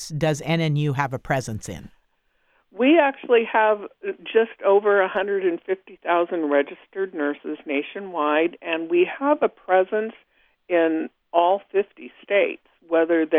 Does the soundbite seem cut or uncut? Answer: uncut